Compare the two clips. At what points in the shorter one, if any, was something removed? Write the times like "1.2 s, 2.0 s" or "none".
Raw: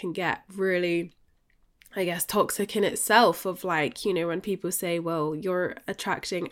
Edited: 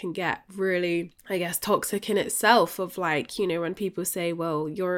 1.2 s